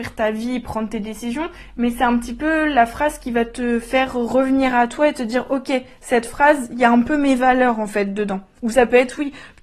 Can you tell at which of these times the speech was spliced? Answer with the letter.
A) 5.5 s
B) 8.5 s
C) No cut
C